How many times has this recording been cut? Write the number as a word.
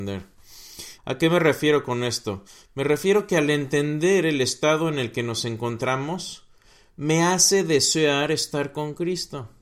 one